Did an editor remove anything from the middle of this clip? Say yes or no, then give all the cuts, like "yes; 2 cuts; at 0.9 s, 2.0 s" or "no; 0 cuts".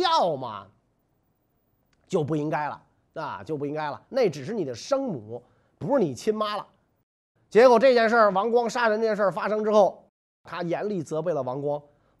yes; 2 cuts; at 4.1 s, 7.4 s